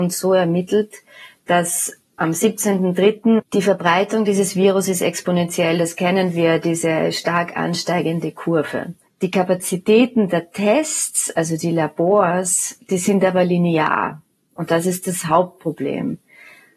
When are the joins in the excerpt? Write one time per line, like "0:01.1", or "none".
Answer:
0:03.4